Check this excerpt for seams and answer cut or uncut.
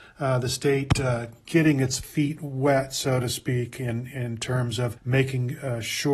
cut